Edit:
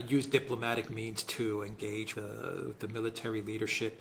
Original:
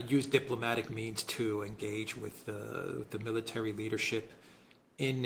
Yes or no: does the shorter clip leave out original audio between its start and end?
yes